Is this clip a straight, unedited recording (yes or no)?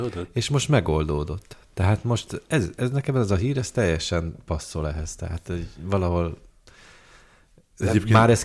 yes